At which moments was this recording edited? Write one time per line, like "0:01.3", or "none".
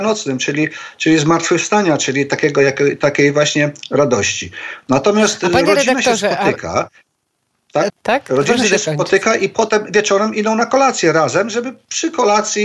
0:07.9